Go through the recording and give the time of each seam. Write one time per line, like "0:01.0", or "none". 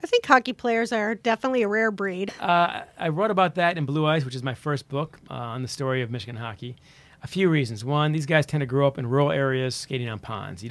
none